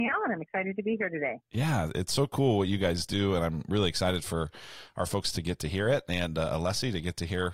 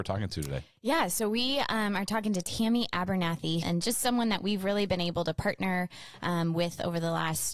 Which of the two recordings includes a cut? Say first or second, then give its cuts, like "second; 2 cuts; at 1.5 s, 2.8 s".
second; 1 cut; at 3.6 s